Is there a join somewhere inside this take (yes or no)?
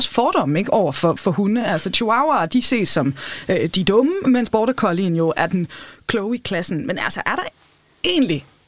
no